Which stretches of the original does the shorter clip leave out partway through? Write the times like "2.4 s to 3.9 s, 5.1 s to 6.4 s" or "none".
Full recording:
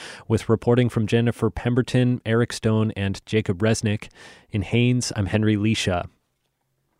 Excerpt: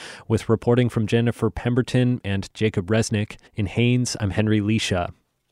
2.2 s to 2.9 s, 4.2 s to 4.4 s